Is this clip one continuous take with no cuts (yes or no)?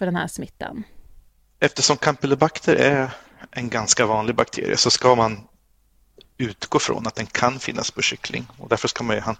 yes